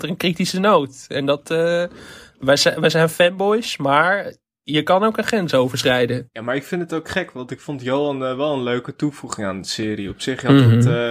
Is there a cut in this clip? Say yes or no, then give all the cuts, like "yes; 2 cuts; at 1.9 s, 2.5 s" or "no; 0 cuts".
no; 0 cuts